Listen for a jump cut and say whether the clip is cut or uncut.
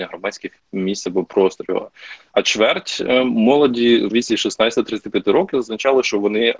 cut